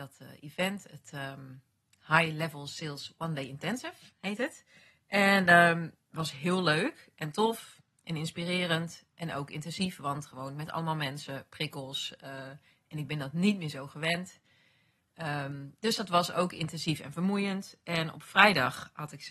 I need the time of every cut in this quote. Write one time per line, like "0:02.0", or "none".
none